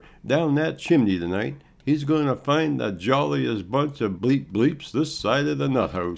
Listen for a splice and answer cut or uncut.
cut